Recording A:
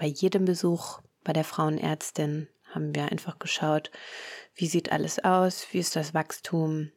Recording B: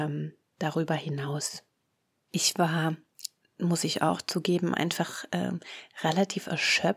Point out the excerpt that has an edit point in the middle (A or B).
B